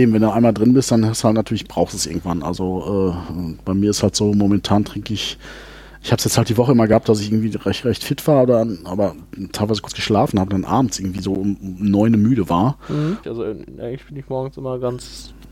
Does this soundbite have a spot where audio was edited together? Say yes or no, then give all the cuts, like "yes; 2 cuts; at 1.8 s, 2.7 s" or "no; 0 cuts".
yes; 1 cut; at 13.2 s